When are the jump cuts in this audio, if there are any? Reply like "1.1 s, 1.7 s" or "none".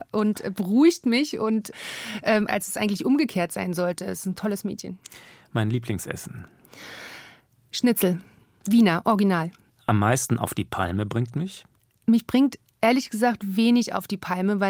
none